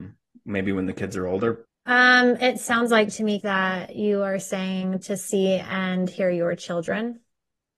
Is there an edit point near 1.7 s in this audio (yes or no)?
yes